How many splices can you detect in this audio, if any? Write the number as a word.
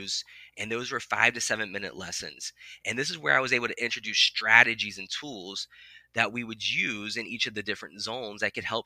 zero